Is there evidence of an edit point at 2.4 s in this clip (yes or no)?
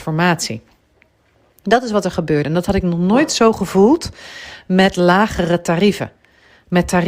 no